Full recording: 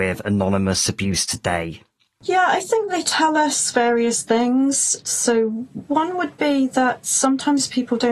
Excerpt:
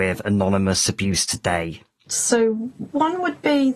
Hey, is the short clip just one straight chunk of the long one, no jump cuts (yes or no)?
no